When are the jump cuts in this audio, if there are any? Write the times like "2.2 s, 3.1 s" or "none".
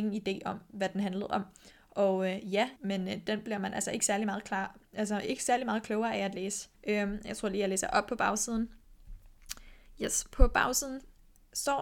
2.8 s, 6.7 s